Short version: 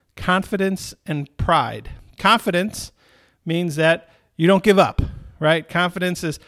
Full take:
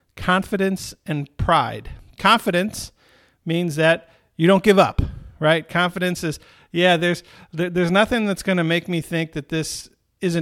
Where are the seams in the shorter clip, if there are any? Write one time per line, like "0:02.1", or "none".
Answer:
none